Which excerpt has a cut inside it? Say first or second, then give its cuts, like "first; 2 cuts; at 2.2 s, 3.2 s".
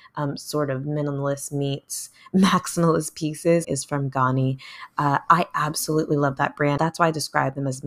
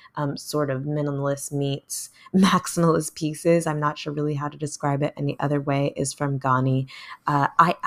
first; 2 cuts; at 3.6 s, 6.8 s